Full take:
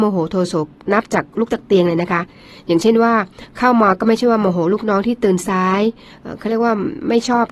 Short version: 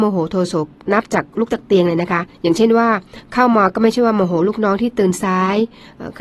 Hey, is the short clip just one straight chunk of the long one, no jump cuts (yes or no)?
no